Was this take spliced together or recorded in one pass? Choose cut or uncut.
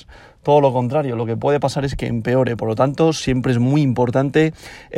cut